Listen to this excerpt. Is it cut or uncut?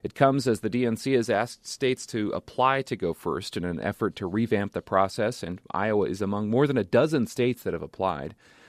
uncut